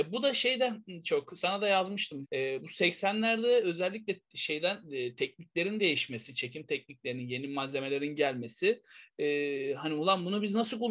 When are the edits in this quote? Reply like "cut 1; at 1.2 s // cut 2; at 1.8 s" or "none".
cut 1; at 2.2 s